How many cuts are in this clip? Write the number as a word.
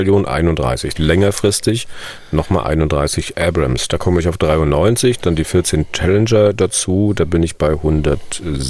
one